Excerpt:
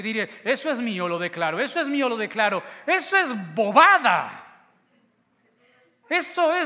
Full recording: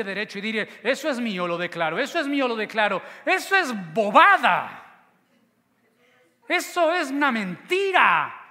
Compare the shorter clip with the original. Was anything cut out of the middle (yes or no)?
no